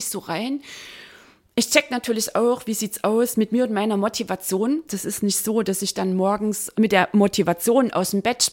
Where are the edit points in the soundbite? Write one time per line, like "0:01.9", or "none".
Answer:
0:04.9
0:06.7